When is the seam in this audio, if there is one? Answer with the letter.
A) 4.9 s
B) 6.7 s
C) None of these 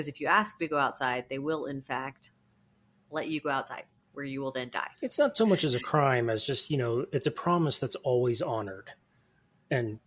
A